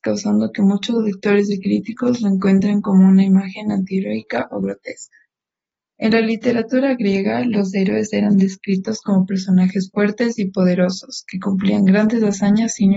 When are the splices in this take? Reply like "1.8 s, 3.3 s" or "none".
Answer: 5.9 s

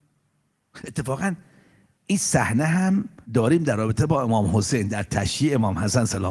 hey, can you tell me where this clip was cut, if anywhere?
3.2 s

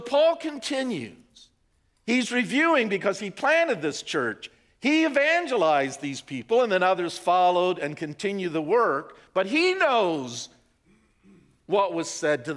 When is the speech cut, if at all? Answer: none

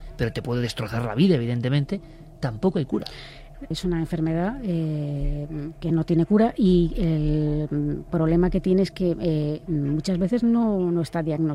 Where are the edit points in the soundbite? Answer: 3.7 s

